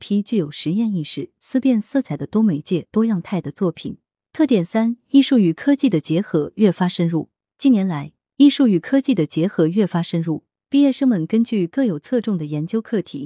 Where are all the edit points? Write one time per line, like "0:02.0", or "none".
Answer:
0:04.2